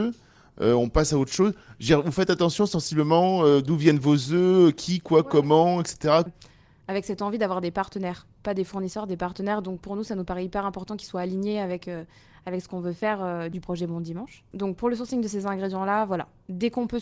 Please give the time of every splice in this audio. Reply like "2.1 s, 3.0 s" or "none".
6.3 s